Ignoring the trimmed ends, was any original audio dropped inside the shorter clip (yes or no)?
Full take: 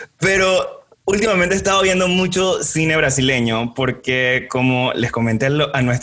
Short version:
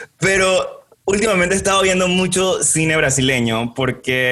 no